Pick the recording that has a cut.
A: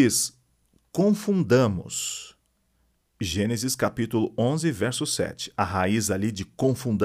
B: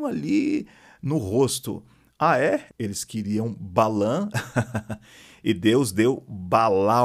B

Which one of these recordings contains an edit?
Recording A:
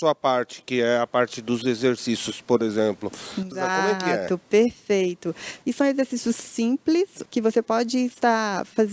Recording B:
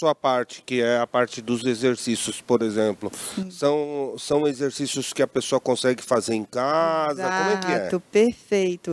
A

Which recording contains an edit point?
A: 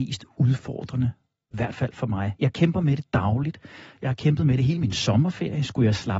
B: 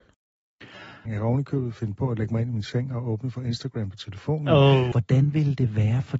B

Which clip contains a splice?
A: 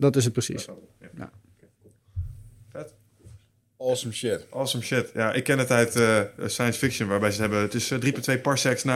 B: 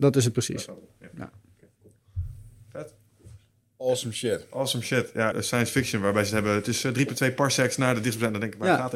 B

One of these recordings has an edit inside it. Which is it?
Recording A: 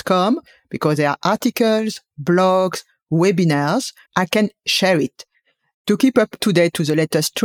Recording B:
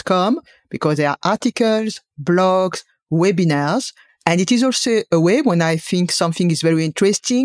A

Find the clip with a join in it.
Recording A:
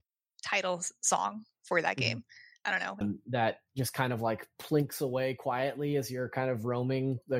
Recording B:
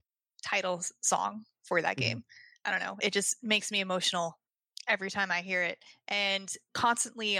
A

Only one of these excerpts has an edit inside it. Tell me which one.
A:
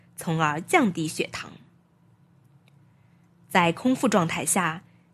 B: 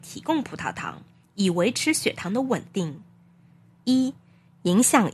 B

